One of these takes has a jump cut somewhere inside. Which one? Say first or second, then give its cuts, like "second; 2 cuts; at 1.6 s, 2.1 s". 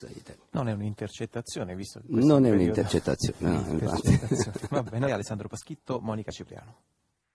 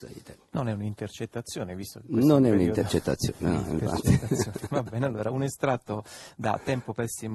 first; 1 cut; at 5.1 s